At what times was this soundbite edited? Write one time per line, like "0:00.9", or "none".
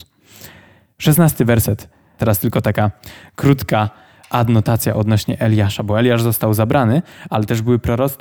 0:02.2